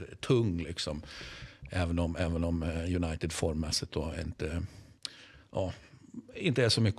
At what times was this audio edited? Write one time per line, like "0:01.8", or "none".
none